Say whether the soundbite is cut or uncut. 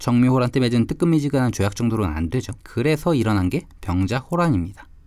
cut